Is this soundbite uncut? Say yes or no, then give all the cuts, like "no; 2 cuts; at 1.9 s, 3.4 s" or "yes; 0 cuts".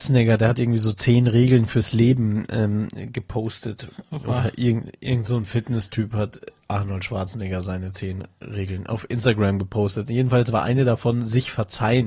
yes; 0 cuts